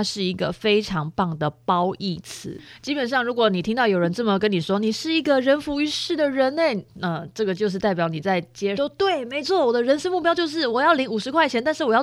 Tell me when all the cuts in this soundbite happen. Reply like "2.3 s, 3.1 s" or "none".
8.7 s

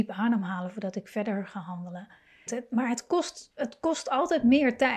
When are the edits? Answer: 2.5 s

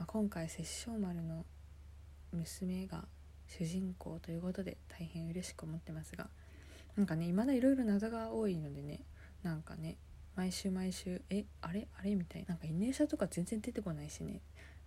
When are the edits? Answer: 12.4 s

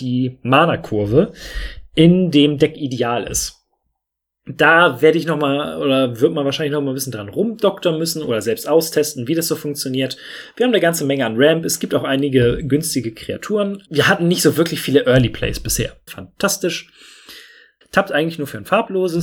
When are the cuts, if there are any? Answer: 13.9 s, 16.1 s, 17.8 s

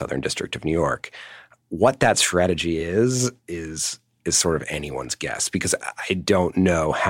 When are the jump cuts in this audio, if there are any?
none

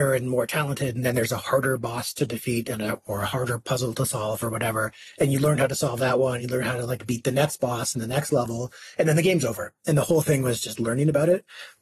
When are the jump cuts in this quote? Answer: 6.4 s

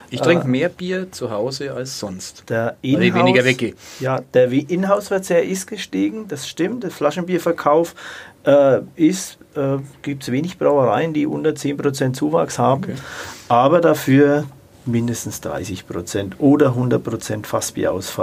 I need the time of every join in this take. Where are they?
none

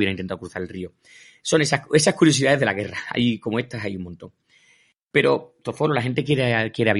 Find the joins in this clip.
none

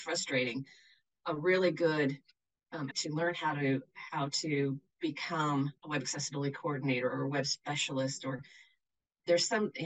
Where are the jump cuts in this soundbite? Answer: 2.9 s, 5.8 s

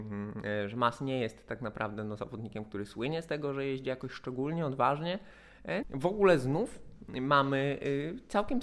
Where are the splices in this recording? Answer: 5.8 s

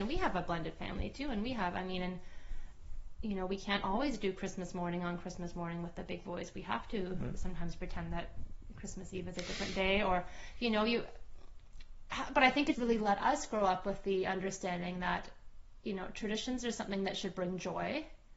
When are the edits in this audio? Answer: 12.7 s

